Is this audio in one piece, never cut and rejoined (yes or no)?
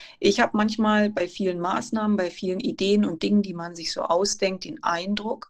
yes